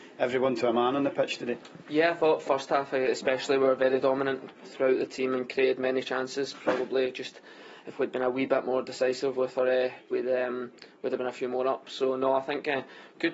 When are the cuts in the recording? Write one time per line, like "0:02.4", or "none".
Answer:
0:04.6
0:10.1